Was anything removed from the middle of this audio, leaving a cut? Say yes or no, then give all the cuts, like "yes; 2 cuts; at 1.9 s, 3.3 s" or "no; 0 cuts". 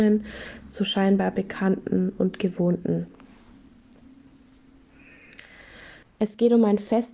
yes; 1 cut; at 6.0 s